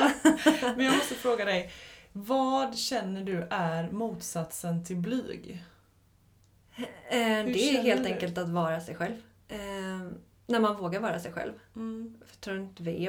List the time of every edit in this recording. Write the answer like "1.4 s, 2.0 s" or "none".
9.4 s